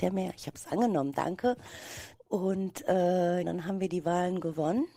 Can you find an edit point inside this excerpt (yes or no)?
yes